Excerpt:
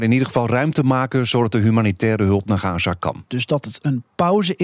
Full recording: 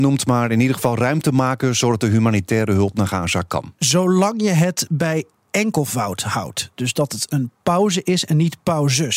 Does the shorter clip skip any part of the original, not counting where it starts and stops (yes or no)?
yes